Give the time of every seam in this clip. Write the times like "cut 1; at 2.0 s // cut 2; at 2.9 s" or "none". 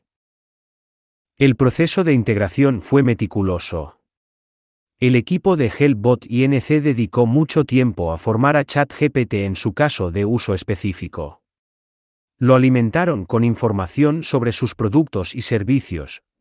none